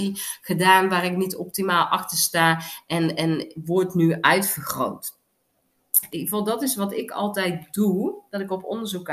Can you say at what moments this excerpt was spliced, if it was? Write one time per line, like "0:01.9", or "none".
0:06.1